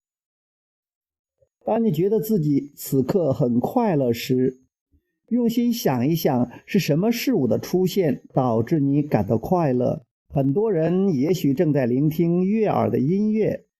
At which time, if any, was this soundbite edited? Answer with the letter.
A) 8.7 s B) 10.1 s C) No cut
B